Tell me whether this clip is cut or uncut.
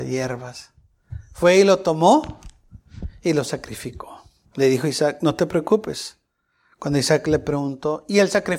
cut